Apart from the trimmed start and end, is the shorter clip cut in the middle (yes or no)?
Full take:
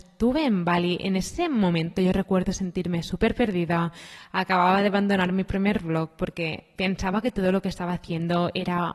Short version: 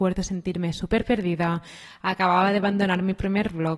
no